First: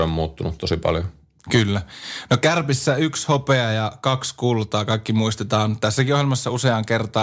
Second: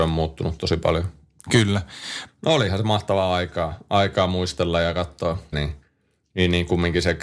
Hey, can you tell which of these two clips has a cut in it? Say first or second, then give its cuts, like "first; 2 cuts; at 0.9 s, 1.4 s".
second; 2 cuts; at 2.3 s, 5.5 s